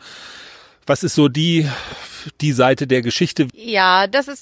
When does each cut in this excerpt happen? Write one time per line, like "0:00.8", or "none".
0:03.5